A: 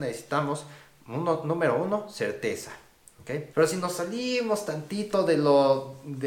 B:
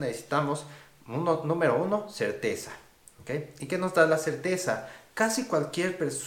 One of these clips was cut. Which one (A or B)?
A